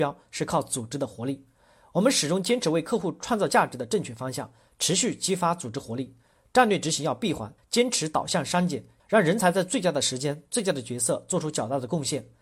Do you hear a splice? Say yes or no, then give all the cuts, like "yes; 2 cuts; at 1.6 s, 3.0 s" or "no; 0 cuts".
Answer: yes; 2 cuts; at 7.6 s, 9.0 s